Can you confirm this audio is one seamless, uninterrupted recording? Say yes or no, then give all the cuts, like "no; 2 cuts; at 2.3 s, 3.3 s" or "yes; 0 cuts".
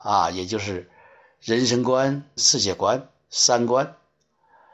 no; 1 cut; at 2.4 s